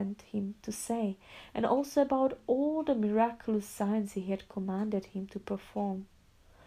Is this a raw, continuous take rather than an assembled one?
yes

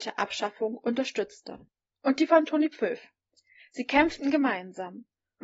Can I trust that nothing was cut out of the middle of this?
no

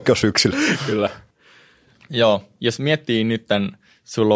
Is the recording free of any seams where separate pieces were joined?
yes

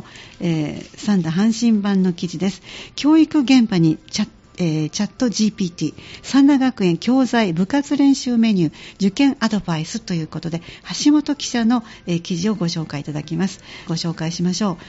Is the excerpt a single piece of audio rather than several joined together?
no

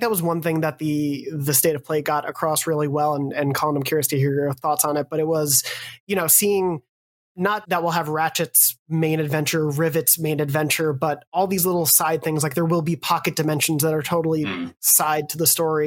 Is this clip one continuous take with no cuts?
no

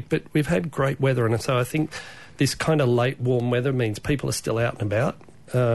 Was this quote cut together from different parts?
no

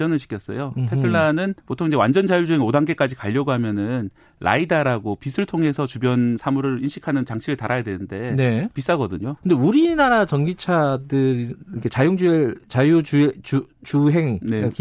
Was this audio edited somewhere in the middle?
yes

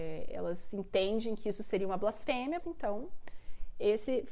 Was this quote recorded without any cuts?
no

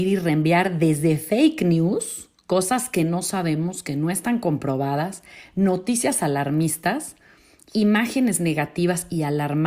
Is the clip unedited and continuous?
yes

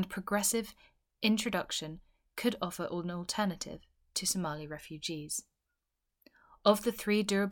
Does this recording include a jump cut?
no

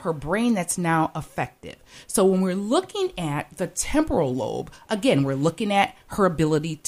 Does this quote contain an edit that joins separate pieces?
no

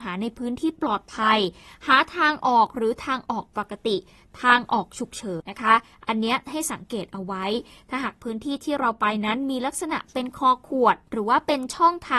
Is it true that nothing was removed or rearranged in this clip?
no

